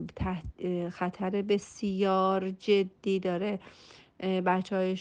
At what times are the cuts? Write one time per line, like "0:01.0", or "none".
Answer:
none